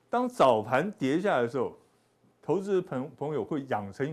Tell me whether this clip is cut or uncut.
uncut